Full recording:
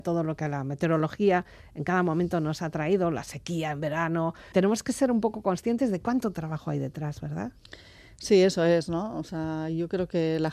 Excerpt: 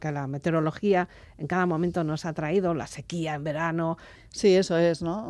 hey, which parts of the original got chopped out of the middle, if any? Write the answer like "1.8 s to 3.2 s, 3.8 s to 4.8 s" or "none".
4.5 s to 8.0 s